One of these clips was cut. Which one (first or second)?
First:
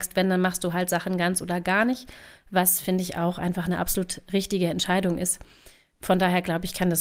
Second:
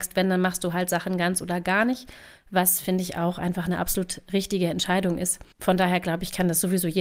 second